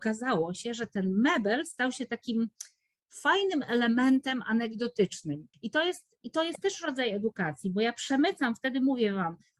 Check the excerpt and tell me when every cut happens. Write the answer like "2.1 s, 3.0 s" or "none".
5.5 s